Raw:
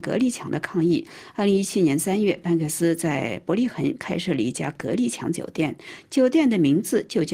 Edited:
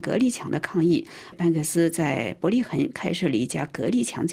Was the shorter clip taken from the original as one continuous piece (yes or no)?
no